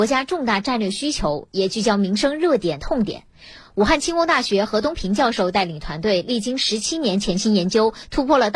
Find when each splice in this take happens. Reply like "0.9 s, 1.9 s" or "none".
2.8 s